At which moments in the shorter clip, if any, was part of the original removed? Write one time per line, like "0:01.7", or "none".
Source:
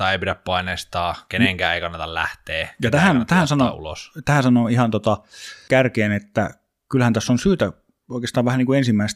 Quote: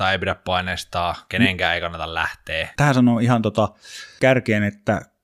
0:02.7